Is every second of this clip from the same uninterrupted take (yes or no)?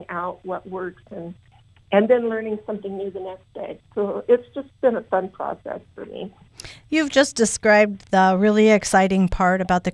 yes